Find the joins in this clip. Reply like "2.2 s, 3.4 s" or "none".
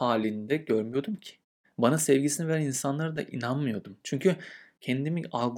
1.6 s, 4.0 s